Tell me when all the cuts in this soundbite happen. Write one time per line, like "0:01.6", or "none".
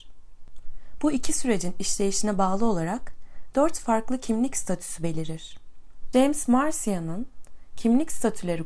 0:01.0
0:06.1